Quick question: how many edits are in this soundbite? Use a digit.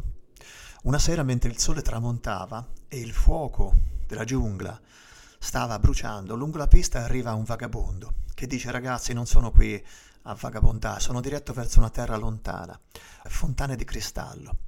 2